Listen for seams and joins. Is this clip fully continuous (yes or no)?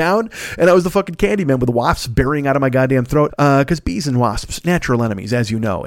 no